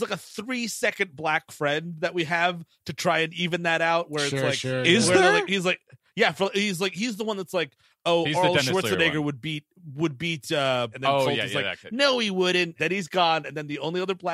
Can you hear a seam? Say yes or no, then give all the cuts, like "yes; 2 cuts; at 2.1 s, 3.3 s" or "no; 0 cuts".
yes; 2 cuts; at 10.9 s, 12.8 s